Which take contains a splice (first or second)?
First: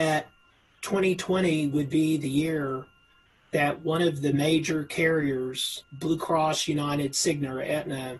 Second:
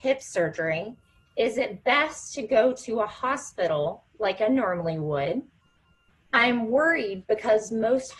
first